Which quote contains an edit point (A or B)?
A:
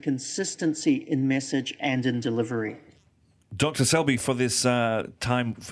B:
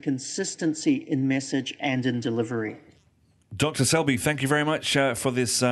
A